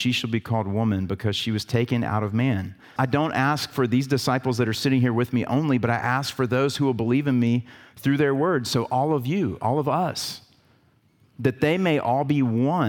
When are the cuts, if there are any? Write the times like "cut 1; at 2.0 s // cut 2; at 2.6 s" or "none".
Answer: cut 1; at 3.0 s